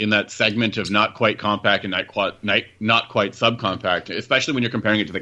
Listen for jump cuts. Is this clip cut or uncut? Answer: uncut